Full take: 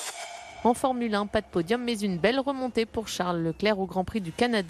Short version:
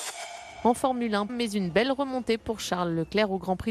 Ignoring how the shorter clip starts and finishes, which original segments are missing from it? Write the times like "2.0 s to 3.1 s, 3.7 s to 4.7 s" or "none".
1.3 s to 1.8 s